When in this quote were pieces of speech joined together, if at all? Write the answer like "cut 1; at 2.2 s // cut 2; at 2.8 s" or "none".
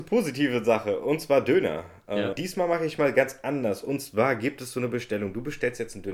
cut 1; at 2.3 s